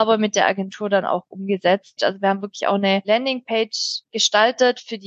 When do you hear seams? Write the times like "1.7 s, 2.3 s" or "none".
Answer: 2.0 s